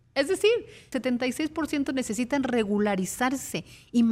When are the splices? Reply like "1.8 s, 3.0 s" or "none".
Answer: 0.9 s